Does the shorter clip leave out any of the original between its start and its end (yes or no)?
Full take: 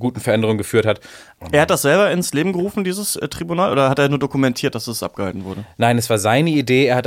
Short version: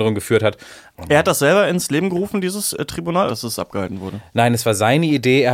yes